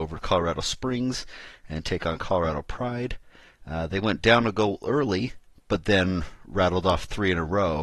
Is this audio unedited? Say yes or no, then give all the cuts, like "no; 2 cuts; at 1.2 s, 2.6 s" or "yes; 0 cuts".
yes; 0 cuts